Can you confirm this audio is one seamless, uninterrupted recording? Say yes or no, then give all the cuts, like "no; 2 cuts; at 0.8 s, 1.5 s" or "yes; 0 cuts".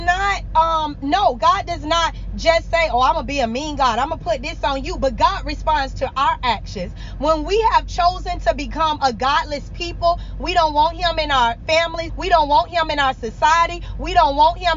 no; 1 cut; at 12.1 s